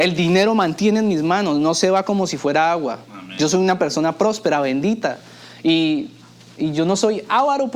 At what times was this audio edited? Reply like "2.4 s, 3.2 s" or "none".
none